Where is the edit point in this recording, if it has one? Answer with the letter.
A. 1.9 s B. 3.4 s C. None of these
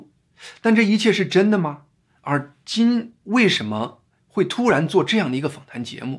C